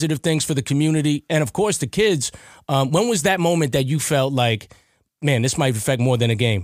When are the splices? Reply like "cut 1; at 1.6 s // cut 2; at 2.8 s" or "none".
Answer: none